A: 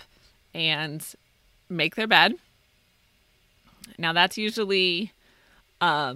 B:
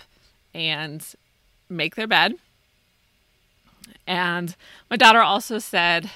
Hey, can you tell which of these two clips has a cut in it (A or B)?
A